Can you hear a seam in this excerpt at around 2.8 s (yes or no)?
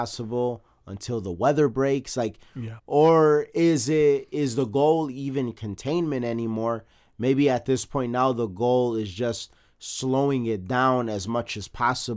yes